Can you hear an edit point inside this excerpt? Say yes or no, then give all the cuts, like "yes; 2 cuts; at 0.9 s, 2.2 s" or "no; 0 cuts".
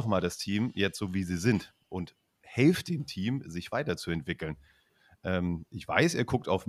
no; 0 cuts